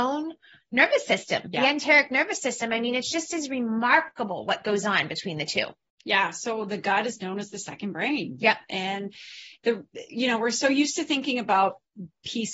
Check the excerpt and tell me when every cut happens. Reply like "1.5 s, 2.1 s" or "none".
none